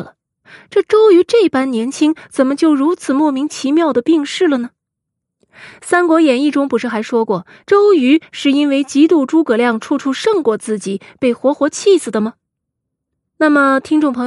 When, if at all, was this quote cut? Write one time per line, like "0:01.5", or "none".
0:13.2